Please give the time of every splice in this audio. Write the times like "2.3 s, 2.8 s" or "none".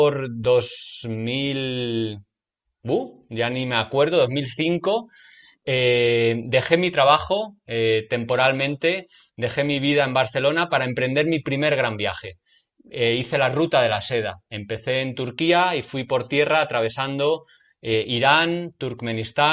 none